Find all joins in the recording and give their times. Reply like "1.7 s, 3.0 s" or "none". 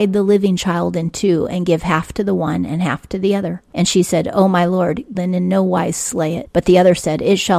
3.7 s, 5.1 s